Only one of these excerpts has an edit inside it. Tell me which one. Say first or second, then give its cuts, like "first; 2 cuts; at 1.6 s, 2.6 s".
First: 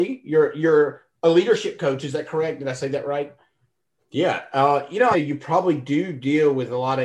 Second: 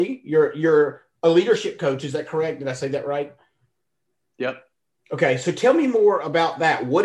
first; 2 cuts; at 4.0 s, 5.1 s